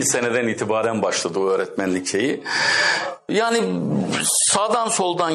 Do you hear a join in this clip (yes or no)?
yes